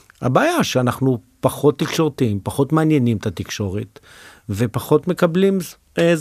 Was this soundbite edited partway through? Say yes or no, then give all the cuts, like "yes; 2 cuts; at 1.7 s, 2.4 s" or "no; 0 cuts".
no; 0 cuts